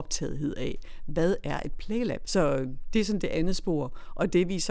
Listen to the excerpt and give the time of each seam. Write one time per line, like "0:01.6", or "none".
0:02.3